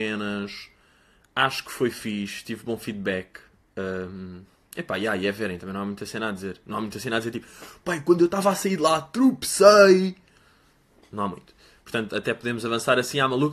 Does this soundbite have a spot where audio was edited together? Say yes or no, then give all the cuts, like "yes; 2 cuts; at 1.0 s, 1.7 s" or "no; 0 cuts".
no; 0 cuts